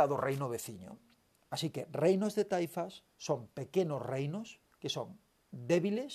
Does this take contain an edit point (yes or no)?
no